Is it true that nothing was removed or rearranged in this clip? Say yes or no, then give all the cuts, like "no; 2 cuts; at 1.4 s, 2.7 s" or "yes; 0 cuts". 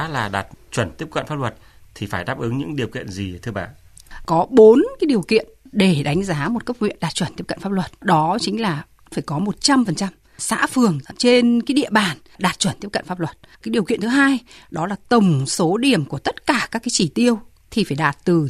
yes; 0 cuts